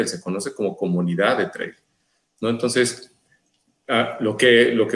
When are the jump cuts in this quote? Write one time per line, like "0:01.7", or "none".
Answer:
none